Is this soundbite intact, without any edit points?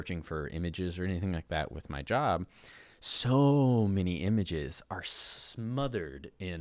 yes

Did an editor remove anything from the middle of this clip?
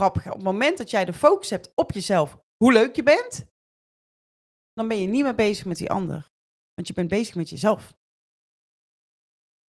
no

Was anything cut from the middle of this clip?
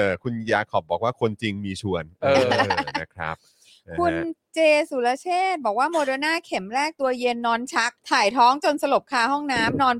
yes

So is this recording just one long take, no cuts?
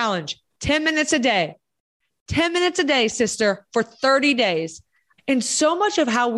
no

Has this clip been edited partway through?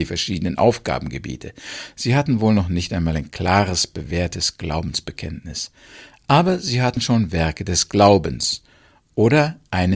no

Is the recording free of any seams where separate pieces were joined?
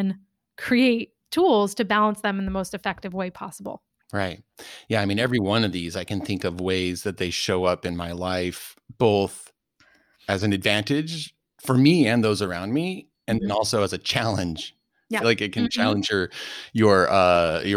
no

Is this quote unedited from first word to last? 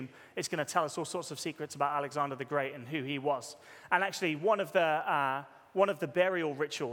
no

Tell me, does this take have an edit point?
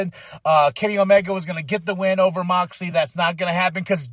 no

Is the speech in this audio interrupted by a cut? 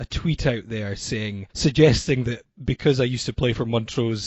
yes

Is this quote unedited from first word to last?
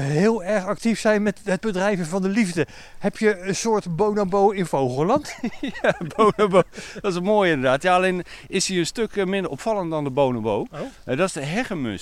yes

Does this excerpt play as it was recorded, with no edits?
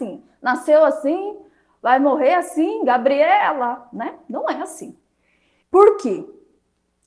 no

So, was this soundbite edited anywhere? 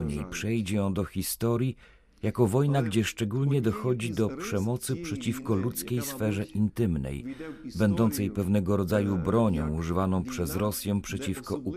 no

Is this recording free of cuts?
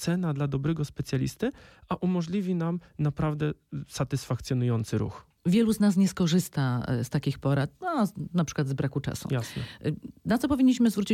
yes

